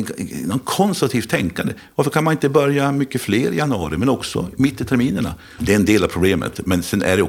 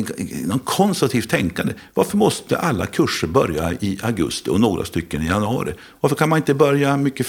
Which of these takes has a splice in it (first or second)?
first